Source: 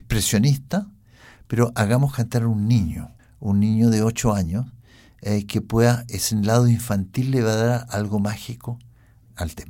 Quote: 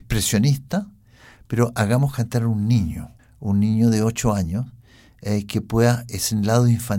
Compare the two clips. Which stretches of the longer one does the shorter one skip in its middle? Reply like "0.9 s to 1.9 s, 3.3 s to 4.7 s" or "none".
none